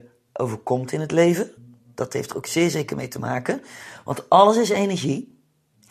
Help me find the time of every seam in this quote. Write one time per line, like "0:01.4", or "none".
none